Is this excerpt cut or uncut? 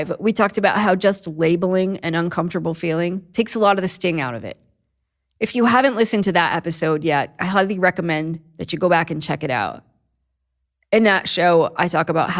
uncut